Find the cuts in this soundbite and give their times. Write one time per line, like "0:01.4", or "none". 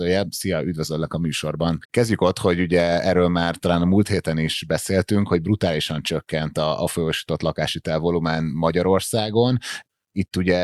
0:01.8